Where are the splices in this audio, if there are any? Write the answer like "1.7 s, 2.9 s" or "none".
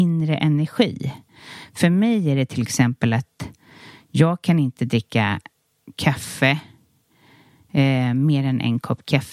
none